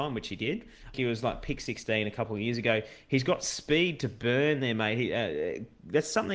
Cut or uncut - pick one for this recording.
cut